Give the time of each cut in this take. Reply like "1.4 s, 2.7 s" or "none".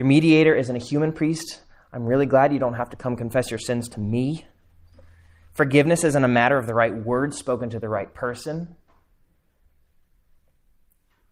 none